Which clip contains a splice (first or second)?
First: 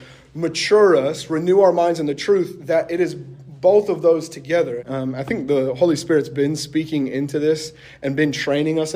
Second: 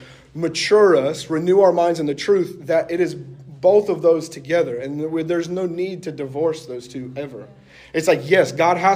first